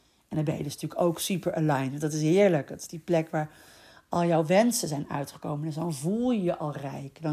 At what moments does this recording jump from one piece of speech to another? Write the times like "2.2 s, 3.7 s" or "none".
none